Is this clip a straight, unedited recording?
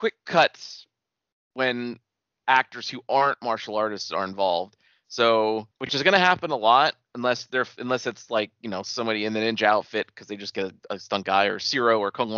no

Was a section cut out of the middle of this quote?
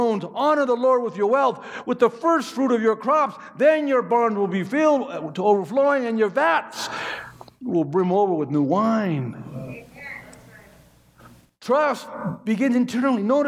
no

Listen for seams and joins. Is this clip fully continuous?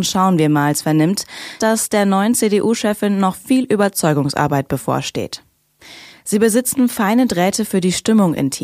no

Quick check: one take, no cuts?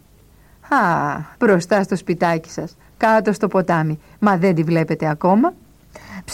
no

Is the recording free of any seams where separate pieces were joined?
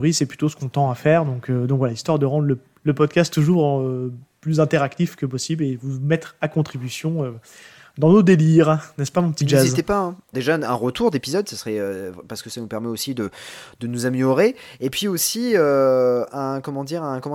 no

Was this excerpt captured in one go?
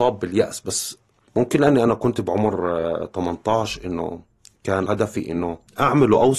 yes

